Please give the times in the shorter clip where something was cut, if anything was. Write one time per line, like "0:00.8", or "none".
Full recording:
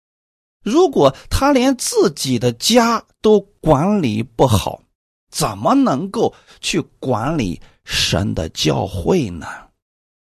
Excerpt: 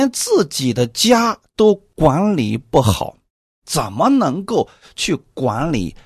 none